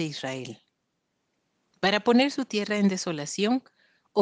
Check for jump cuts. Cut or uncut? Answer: cut